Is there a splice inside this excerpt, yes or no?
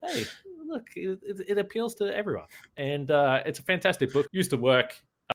yes